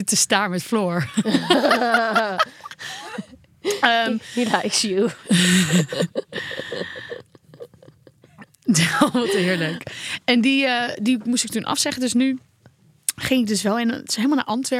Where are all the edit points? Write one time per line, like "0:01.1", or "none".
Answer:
none